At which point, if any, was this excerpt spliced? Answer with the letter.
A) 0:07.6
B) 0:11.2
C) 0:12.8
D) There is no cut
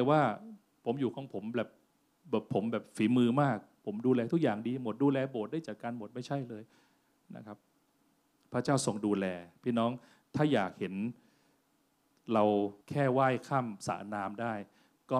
C